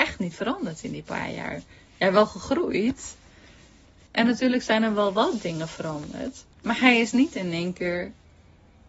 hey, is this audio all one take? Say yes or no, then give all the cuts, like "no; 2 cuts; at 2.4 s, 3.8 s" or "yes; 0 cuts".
no; 2 cuts; at 4.1 s, 6.5 s